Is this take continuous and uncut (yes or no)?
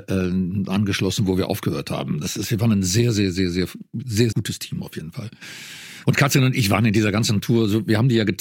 no